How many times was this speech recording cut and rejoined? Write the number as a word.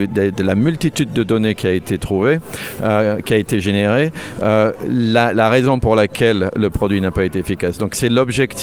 zero